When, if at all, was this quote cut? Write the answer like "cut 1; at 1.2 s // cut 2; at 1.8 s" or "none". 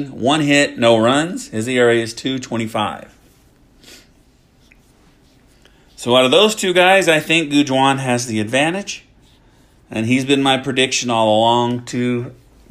none